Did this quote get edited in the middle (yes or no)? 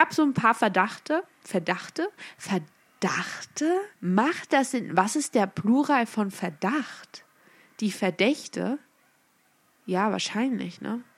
yes